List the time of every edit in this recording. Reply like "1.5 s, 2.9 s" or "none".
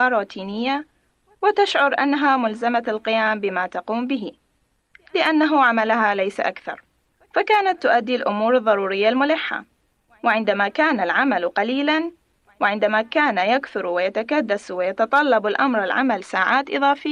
12.5 s